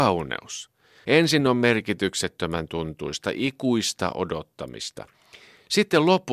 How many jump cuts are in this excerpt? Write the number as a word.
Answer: one